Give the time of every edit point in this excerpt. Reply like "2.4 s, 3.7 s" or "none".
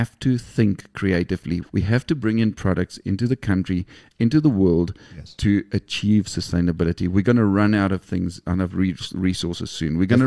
1.6 s